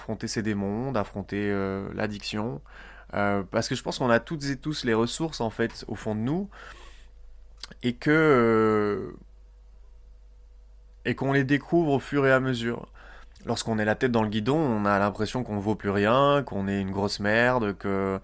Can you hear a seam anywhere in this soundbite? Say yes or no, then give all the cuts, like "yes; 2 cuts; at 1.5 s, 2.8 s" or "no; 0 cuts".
yes; 1 cut; at 13.3 s